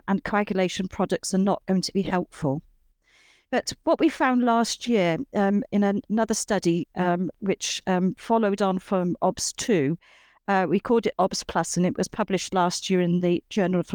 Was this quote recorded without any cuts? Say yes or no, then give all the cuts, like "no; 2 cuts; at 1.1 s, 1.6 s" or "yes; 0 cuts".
yes; 0 cuts